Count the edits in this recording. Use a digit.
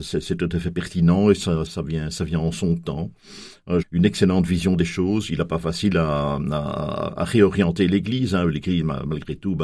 2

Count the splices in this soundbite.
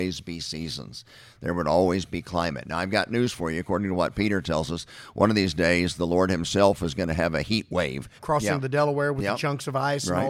1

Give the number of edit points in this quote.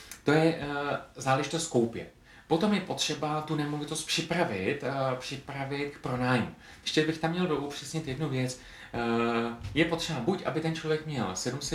1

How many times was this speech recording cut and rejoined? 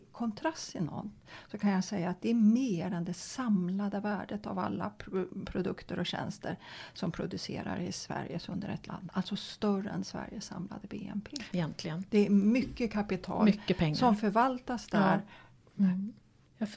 2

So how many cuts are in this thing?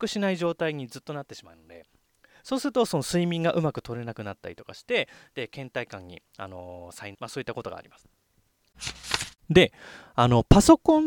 2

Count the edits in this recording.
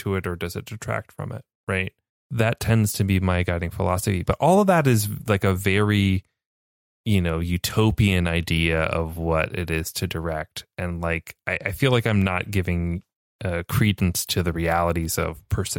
0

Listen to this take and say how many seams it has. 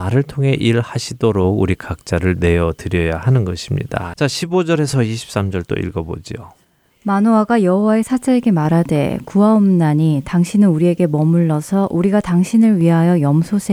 1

